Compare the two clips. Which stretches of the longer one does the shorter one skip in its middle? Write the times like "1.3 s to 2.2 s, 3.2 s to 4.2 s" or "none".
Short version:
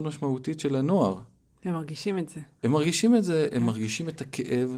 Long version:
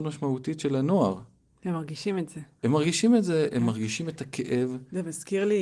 none